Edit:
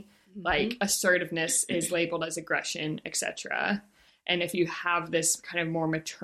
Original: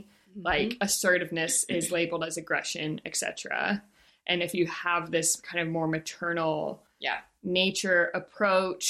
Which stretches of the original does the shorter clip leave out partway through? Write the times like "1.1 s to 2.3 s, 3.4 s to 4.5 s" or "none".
none